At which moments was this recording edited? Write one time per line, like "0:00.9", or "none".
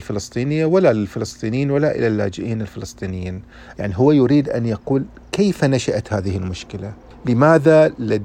0:03.7